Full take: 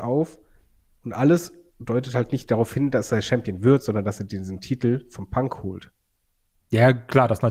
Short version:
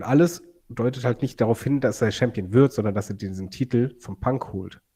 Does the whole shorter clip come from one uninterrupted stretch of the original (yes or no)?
yes